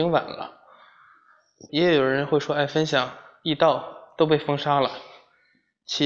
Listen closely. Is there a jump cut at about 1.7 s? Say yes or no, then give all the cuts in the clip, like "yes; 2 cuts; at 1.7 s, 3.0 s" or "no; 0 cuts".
yes; 1 cut; at 1.7 s